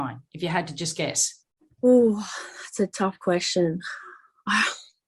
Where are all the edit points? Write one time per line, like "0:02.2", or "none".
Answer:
none